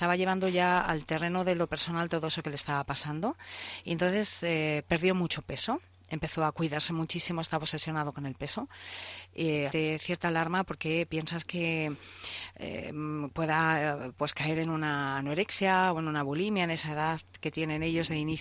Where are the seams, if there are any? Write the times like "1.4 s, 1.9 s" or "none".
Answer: 9.7 s